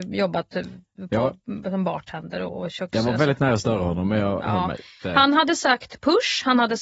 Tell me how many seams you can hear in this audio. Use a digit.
0